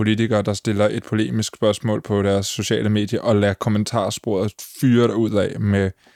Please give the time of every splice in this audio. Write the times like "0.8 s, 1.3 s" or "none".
none